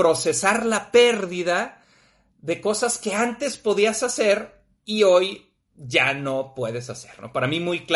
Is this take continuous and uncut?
yes; 0 cuts

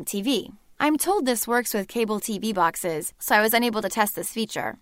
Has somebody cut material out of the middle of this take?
yes; 1 cut; at 3.1 s

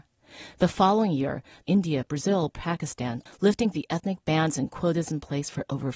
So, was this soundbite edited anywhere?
yes; 2 cuts; at 1.6 s, 3.3 s

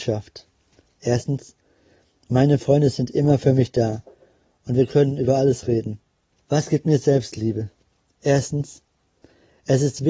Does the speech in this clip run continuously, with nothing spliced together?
no; 1 cut; at 6.3 s

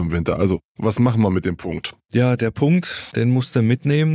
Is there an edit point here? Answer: yes; 1 cut; at 3.1 s

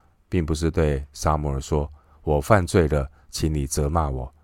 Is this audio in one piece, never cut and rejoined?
yes; 0 cuts

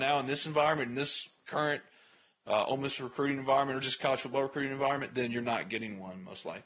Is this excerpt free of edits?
yes; 0 cuts

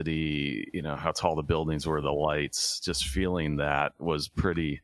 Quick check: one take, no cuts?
yes; 0 cuts

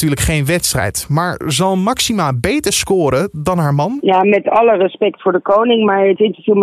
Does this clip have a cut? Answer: no; 0 cuts

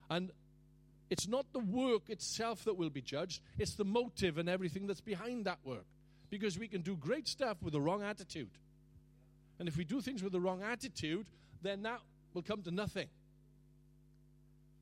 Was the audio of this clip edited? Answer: no; 0 cuts

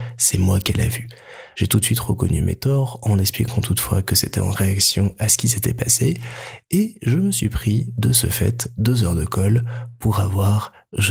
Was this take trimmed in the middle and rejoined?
no; 0 cuts

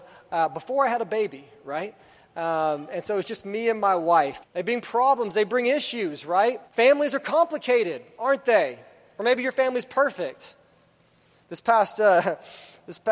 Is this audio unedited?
no; 2 cuts; at 4.4 s, 6.7 s

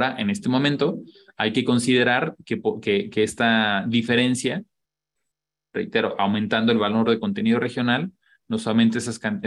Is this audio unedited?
yes; 0 cuts

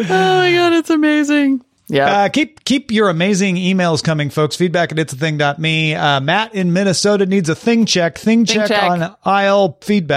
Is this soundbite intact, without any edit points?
yes; 0 cuts

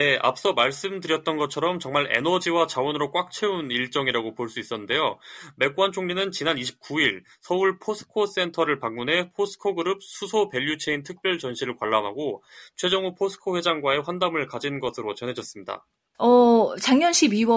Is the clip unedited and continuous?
no; 1 cut; at 16.1 s

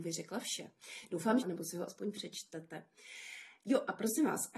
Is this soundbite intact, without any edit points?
no; 1 cut; at 1.4 s

